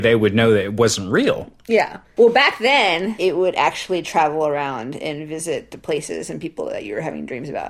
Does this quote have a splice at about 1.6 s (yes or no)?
no